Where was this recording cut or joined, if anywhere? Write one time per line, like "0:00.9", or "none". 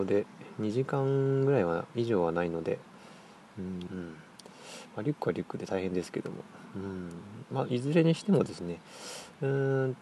0:03.9